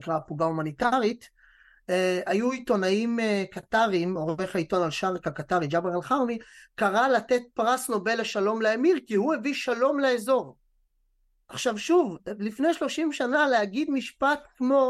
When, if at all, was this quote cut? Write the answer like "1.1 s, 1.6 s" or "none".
none